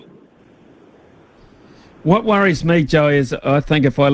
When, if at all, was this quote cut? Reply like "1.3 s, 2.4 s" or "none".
none